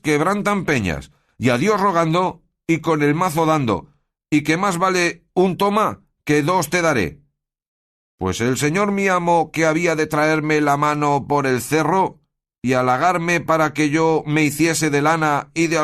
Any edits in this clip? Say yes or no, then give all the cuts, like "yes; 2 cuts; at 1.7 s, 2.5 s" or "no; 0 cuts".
no; 0 cuts